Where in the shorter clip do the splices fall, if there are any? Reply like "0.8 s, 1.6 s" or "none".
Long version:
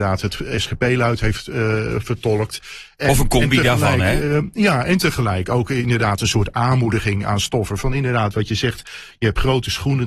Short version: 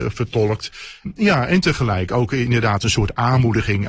1.1 s